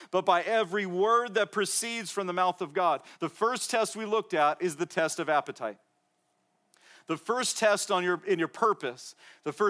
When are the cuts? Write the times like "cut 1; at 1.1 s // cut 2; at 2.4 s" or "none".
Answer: none